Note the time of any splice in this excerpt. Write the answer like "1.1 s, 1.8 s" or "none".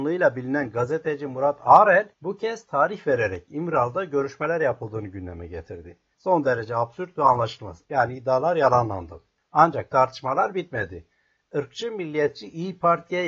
2.1 s, 6.1 s, 7.8 s

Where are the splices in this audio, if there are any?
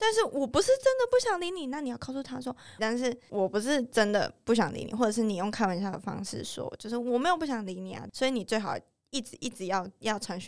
2.8 s

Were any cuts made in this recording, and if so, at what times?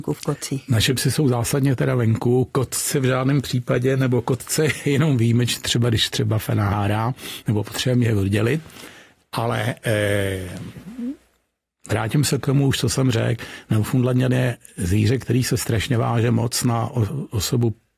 none

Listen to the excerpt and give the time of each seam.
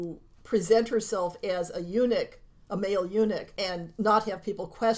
none

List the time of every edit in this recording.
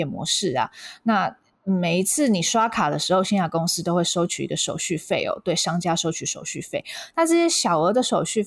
none

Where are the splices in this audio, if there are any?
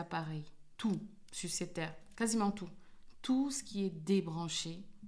none

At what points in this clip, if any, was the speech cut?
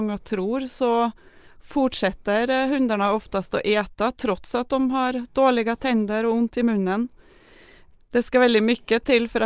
none

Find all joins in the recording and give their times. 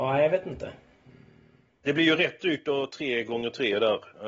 2.9 s

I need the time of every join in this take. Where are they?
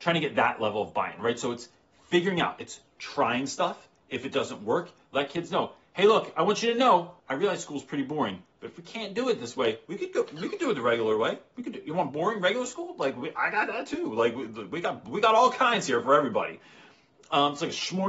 7.2 s

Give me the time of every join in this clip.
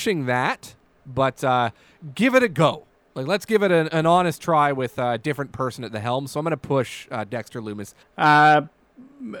1.0 s, 8.0 s

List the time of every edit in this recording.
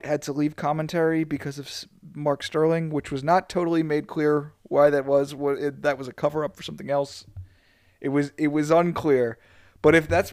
none

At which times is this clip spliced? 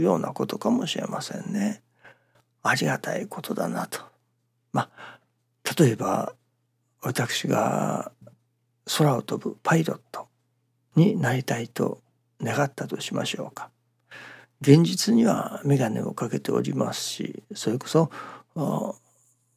none

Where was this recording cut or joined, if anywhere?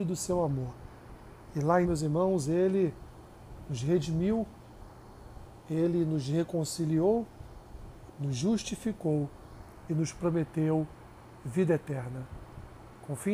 1.8 s, 8.1 s

